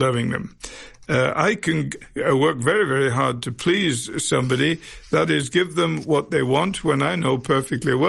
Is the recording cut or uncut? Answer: uncut